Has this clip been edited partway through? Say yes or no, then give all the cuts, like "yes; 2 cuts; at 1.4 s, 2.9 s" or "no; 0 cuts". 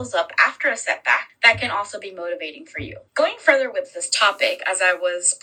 no; 0 cuts